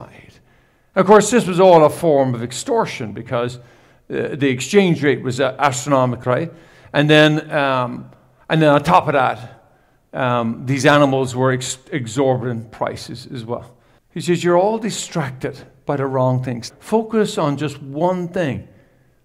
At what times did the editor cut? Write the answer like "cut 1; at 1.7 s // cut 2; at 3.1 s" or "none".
cut 1; at 6.2 s // cut 2; at 14.0 s // cut 3; at 16.7 s